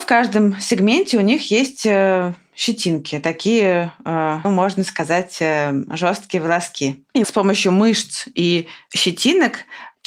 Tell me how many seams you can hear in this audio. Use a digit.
2